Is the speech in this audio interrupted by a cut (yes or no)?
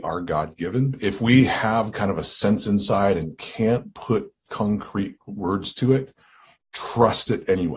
no